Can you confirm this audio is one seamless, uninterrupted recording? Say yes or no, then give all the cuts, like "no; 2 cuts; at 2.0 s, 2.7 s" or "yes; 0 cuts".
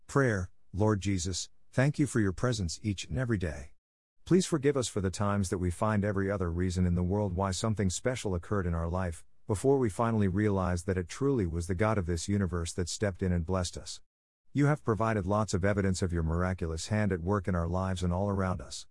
yes; 0 cuts